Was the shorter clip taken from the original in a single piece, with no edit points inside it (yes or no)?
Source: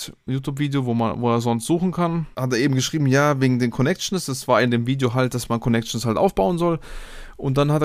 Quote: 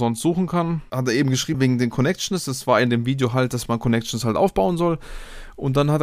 no